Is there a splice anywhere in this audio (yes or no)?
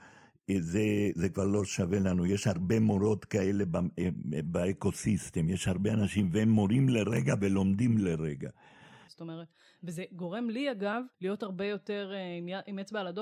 yes